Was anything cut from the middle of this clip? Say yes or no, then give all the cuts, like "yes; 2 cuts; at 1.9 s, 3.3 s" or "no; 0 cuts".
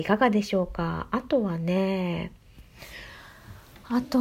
no; 0 cuts